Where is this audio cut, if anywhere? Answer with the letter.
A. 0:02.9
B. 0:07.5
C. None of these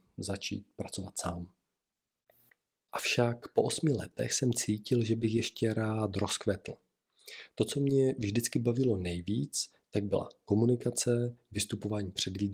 A